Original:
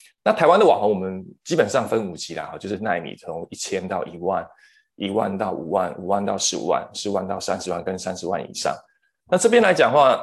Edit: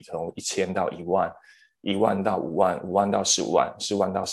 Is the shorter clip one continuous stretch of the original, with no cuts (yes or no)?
yes